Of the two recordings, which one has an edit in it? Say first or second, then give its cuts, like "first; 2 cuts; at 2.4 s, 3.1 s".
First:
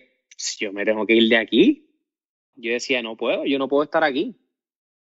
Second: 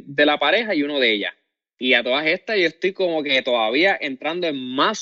first; 1 cut; at 2.5 s